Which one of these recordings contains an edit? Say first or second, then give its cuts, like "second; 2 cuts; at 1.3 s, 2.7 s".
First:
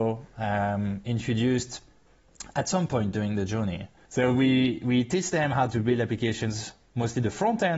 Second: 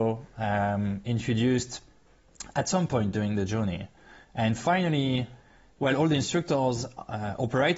first; 1 cut; at 4.1 s